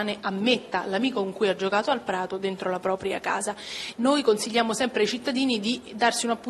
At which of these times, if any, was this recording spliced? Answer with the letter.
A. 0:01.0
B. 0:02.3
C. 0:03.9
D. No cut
C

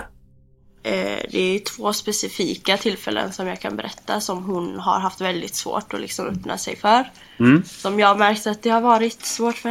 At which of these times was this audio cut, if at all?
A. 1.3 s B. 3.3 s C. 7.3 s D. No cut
D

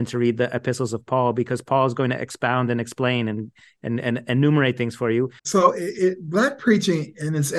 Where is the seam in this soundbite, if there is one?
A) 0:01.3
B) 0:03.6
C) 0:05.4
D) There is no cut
C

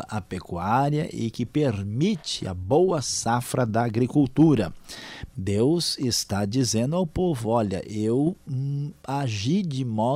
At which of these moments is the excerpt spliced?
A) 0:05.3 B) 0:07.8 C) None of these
A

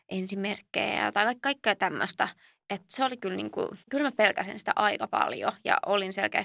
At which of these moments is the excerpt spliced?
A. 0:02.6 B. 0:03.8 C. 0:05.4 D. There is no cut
B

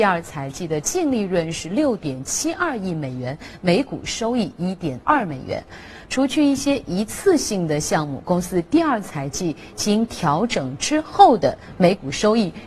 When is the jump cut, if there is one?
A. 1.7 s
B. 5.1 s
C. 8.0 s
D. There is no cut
B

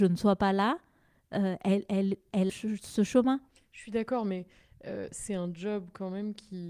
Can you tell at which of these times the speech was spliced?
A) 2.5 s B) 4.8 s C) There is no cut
A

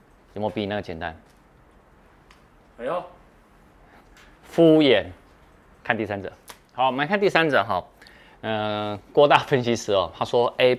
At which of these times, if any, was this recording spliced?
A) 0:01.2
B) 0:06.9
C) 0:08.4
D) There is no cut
D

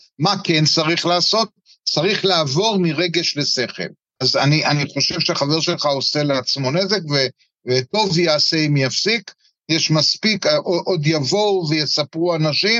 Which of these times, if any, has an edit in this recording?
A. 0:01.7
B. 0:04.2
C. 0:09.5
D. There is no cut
B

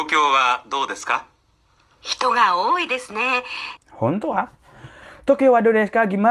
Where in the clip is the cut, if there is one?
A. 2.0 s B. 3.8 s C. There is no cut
B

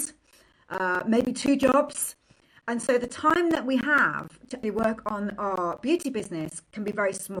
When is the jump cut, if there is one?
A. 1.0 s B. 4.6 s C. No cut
B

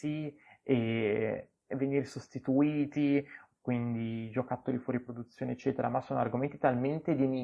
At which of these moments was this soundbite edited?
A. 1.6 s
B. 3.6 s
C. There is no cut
B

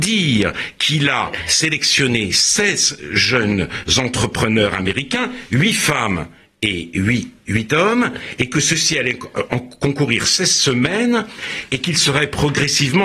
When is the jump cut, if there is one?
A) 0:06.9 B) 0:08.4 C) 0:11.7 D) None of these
D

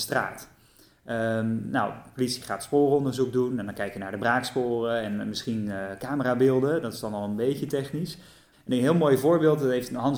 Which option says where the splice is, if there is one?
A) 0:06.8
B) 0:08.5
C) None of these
B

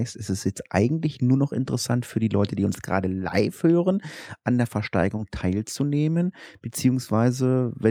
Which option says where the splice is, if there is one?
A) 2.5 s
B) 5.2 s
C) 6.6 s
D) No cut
D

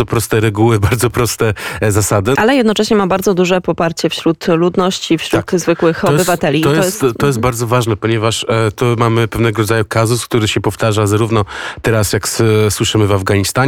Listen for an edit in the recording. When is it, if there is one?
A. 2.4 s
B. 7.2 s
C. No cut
A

